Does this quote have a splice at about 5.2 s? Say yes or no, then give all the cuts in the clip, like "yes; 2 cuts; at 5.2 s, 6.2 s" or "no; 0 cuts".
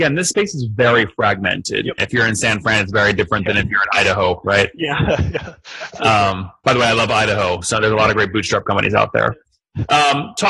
no; 1 cut; at 2.0 s